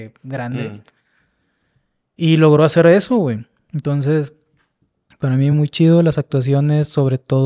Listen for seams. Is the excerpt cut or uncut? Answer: uncut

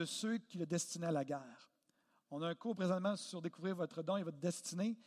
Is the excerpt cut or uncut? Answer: uncut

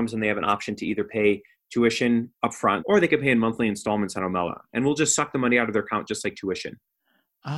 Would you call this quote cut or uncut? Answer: cut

